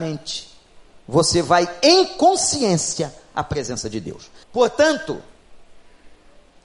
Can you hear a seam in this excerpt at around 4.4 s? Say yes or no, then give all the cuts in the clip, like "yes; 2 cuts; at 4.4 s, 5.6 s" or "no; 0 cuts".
yes; 1 cut; at 4.4 s